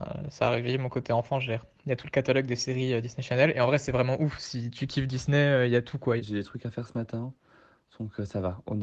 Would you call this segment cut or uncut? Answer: cut